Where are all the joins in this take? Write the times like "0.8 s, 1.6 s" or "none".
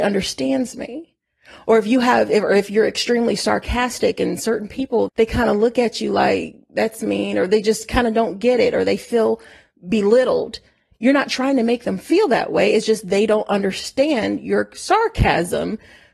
5.1 s